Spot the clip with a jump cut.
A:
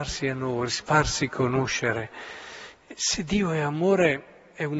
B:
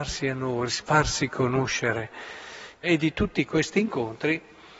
B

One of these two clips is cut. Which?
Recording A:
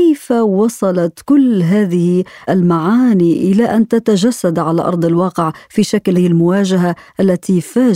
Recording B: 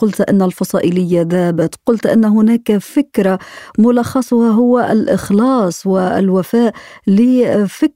A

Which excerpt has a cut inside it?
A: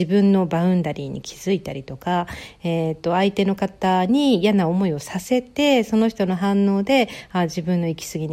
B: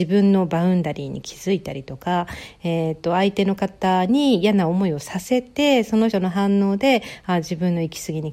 B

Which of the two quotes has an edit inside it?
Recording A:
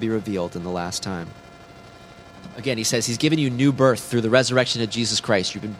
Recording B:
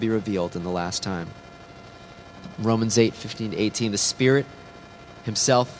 B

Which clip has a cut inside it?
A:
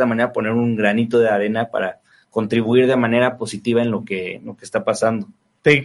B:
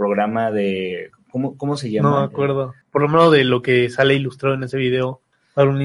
B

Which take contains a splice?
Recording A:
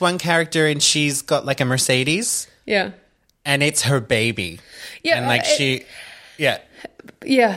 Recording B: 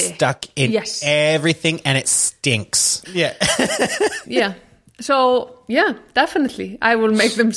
B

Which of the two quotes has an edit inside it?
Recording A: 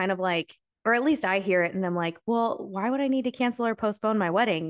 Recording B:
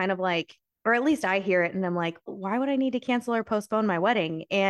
B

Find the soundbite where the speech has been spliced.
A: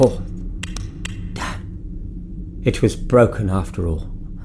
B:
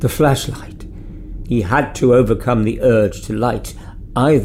B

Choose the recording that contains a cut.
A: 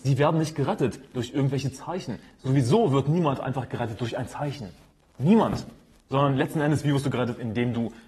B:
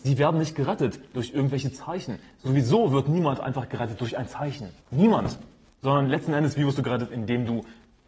B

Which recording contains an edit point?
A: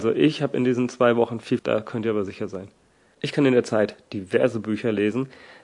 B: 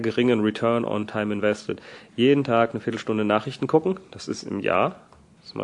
A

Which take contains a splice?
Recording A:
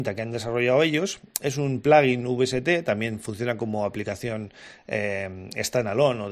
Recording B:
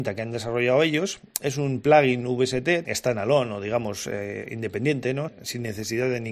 B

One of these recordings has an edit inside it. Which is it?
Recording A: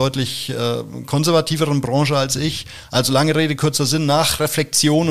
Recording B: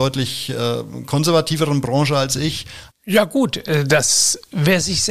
B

